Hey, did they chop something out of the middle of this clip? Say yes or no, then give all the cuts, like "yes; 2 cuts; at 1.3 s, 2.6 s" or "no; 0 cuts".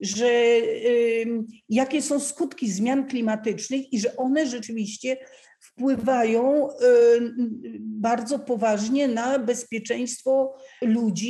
no; 0 cuts